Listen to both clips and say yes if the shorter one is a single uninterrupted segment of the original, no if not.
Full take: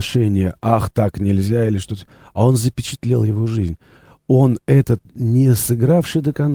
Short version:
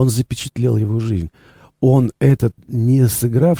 yes